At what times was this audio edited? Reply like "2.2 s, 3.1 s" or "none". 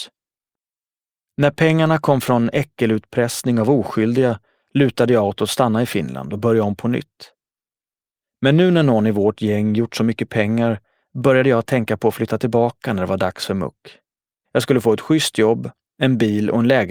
14.4 s

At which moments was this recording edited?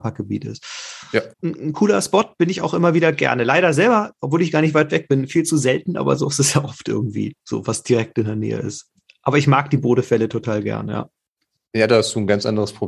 1.3 s

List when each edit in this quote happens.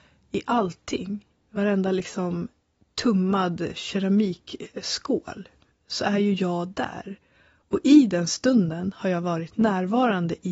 1.3 s

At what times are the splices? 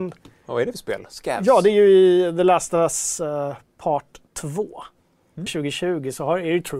4.3 s, 5.5 s

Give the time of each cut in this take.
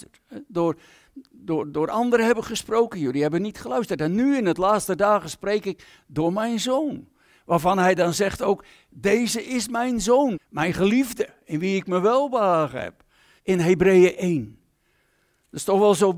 10.3 s, 13.4 s

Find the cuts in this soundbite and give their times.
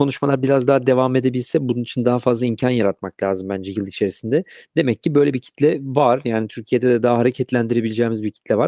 none

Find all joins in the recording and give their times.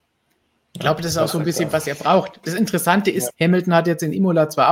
3.3 s

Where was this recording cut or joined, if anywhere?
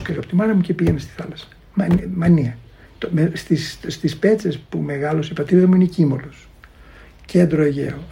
none

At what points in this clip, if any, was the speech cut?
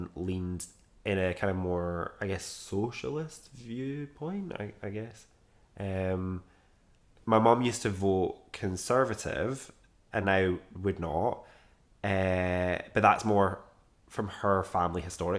none

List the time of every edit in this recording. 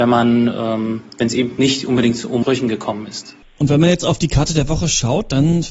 none

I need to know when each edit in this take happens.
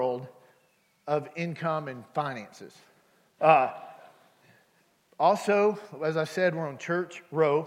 3.4 s

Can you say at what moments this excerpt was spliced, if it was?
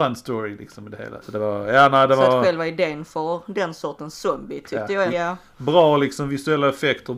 1.2 s, 5.1 s

